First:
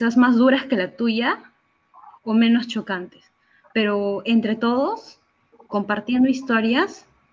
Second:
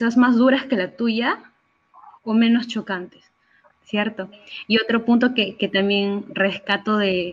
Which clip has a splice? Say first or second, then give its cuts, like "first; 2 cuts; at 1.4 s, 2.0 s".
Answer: second; 2 cuts; at 3.7 s, 5.6 s